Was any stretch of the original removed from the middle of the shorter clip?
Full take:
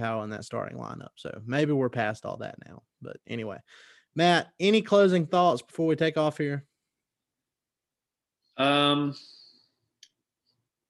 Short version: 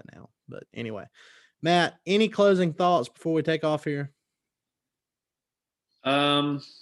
no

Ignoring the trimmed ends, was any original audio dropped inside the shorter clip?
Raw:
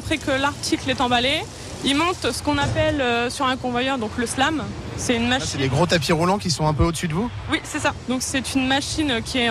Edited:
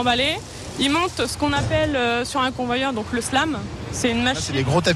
no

